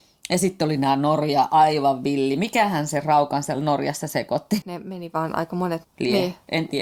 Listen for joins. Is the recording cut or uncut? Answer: cut